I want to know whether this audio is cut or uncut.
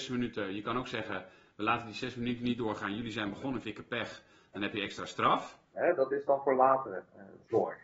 cut